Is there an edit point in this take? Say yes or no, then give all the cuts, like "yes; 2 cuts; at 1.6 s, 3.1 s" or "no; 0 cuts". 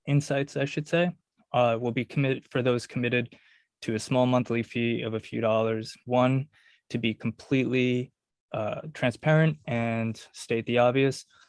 yes; 1 cut; at 6.0 s